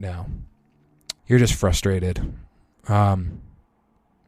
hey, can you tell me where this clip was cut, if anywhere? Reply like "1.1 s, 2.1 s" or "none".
1.2 s